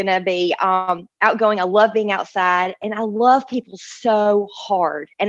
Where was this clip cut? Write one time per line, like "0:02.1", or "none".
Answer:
none